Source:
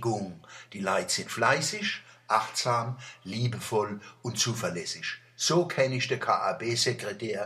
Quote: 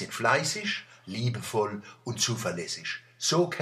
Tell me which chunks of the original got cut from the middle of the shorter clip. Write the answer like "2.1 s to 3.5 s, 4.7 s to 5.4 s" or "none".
2.2 s to 3.2 s